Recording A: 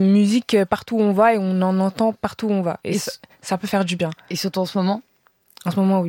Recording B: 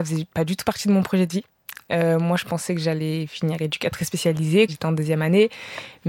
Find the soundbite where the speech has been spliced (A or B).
B